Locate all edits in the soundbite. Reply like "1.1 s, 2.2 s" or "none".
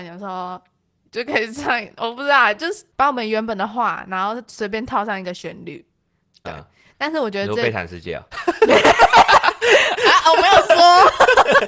8.3 s